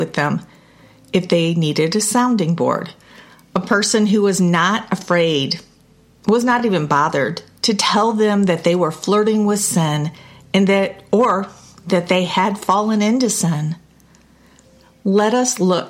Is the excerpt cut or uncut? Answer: uncut